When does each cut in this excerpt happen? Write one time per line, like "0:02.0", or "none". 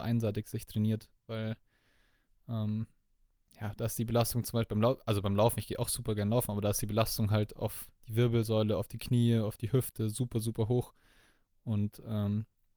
none